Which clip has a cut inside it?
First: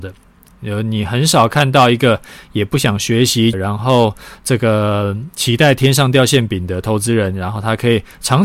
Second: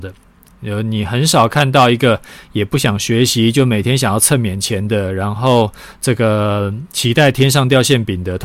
first; 1 cut; at 3.5 s

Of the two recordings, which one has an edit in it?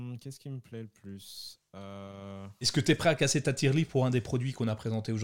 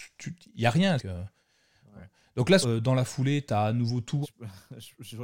second; 3 cuts; at 1.0 s, 2.6 s, 4.2 s

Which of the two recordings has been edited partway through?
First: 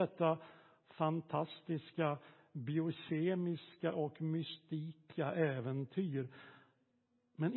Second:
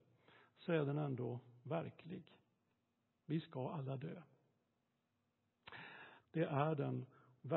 second; 1 cut; at 6.2 s

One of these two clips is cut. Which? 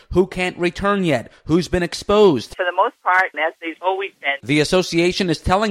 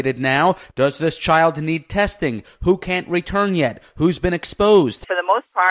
first; 2 cuts; at 3.3 s, 4.4 s

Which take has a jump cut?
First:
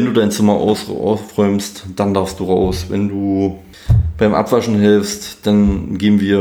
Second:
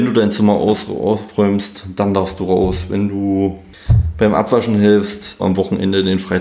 second; 1 cut; at 5.4 s

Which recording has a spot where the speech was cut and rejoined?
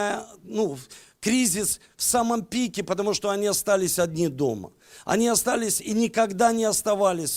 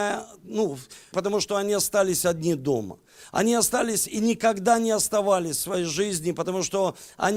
second; 1 cut; at 1.1 s

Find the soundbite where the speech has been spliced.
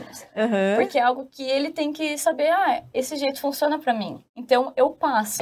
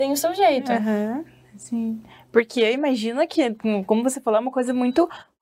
first; 1 cut; at 4.3 s

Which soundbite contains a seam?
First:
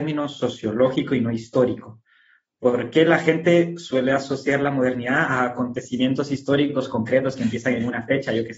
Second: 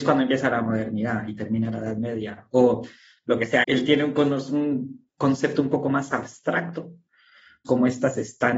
second; 2 cuts; at 3.6 s, 7.6 s

